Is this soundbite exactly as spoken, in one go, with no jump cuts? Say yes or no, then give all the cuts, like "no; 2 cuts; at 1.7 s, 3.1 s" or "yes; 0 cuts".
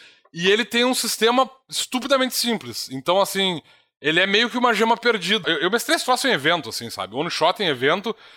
no; 1 cut; at 5.4 s